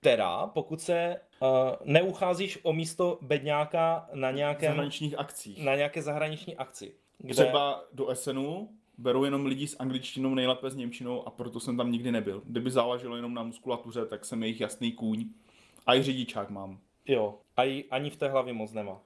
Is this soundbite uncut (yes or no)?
yes